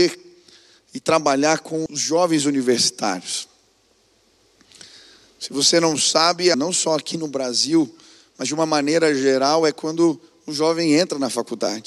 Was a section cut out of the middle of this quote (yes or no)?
yes